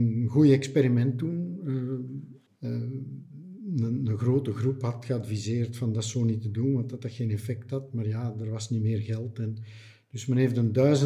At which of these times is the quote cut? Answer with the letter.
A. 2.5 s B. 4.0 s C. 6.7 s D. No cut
A